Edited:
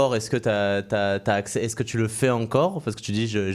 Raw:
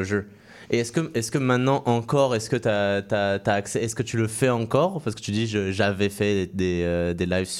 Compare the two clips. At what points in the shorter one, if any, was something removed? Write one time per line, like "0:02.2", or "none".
none